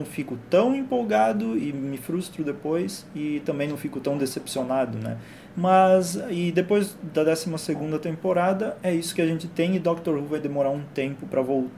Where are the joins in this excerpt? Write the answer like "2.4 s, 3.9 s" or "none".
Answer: 5.5 s